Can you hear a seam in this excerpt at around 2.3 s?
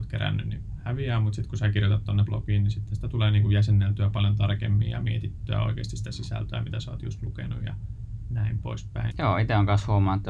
yes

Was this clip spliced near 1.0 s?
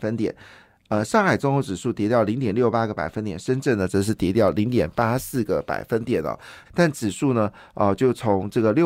no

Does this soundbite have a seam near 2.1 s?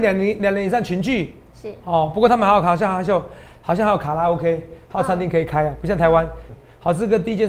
no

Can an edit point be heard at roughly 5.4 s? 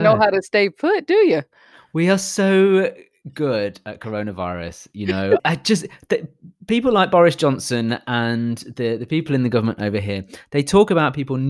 yes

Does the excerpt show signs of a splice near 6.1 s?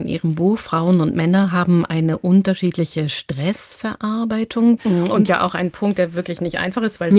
no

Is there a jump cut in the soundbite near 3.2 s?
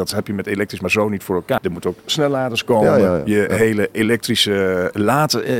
no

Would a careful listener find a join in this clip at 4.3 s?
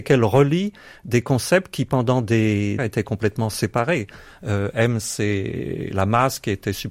no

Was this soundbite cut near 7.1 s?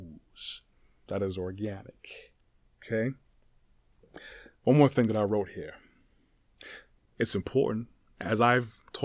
no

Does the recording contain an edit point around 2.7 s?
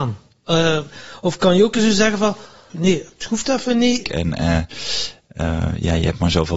yes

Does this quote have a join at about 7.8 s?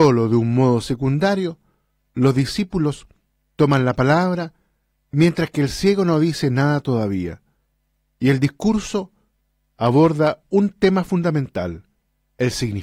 no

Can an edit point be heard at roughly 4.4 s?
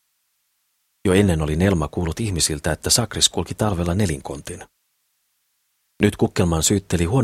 no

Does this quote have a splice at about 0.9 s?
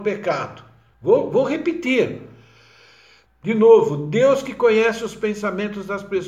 yes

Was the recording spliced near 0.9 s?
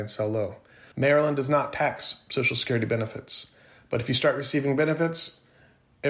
yes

